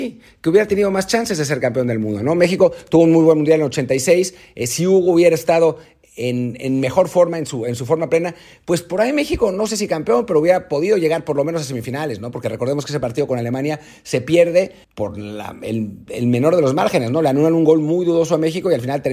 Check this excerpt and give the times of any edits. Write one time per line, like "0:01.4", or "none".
0:14.8